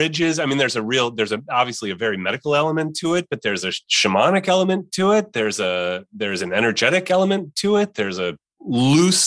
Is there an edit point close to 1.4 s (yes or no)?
no